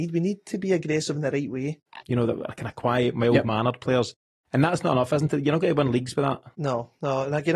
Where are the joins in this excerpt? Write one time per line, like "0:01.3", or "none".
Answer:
0:02.0